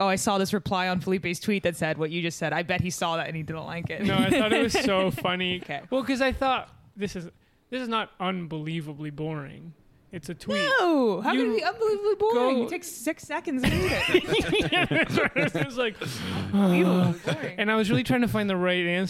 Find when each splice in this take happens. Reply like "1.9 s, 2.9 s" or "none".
5.6 s